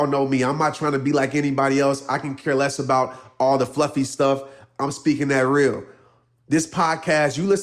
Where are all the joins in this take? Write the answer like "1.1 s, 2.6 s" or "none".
none